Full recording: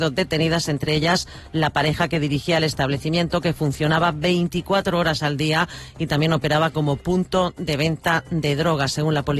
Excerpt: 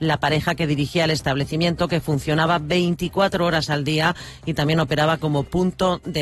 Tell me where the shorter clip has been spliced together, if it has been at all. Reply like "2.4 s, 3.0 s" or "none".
none